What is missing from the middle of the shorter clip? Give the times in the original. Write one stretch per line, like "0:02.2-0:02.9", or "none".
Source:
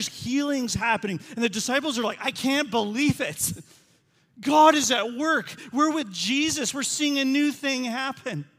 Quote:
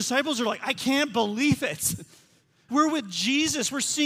0:04.3-0:05.7